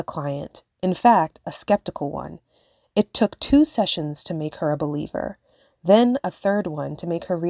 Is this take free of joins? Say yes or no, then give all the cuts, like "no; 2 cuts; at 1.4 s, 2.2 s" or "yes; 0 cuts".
yes; 0 cuts